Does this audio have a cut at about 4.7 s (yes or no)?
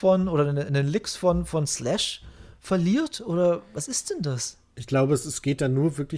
yes